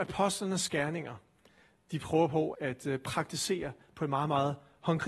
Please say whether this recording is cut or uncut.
cut